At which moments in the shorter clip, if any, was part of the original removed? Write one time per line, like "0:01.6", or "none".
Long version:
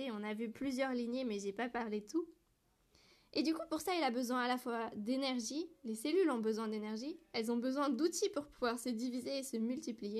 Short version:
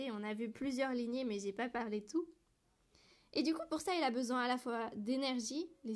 none